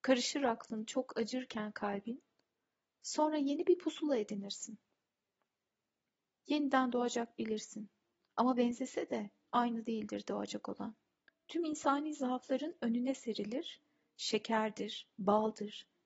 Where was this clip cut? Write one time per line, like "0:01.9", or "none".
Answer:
0:06.4
0:11.3